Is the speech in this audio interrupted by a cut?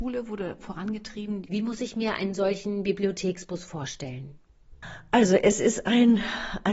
yes; 1 cut; at 1.4 s

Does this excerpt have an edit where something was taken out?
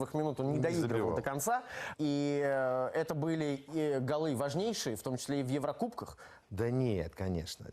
yes; 2 cuts; at 1.9 s, 6.4 s

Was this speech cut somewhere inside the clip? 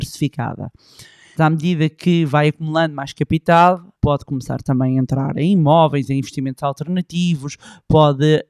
yes; 3 cuts; at 1.4 s, 3.9 s, 6.1 s

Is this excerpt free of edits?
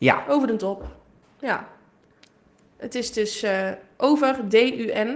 yes; 0 cuts

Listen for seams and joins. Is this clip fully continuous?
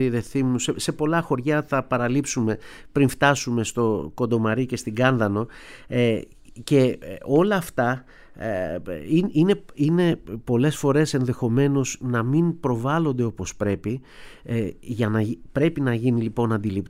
yes; 0 cuts

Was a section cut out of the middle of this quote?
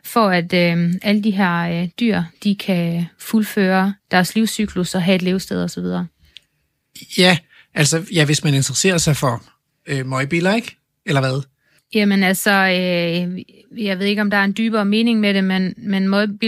yes; 1 cut; at 11.8 s

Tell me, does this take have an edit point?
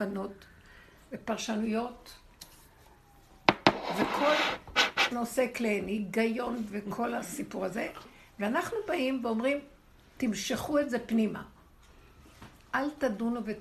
no; 0 cuts

